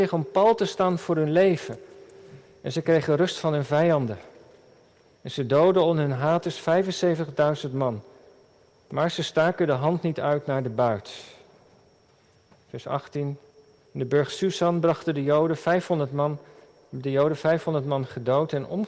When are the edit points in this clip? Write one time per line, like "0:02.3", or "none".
0:13.8